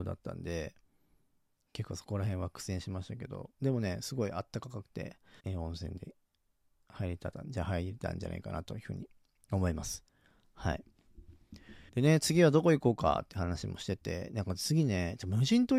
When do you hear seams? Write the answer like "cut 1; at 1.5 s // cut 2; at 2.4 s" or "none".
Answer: cut 1; at 5.4 s // cut 2; at 11.9 s